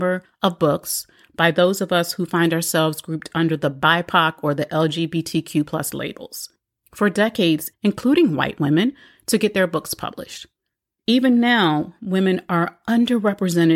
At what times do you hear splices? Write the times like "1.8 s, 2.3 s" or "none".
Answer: 7.7 s, 11.0 s